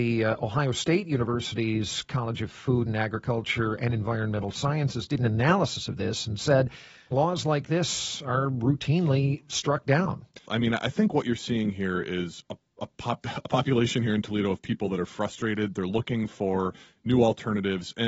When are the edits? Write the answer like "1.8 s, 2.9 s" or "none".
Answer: 7.1 s, 10.5 s, 12.4 s